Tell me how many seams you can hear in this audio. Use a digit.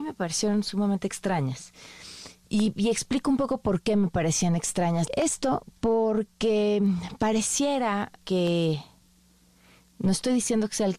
2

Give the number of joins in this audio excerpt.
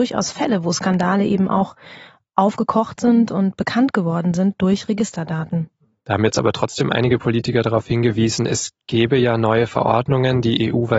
0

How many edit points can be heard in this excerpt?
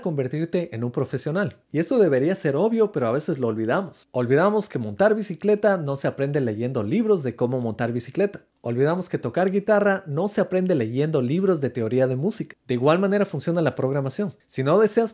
0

